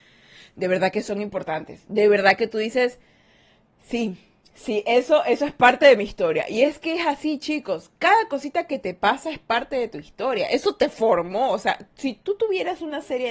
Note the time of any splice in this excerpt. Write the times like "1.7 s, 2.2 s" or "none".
none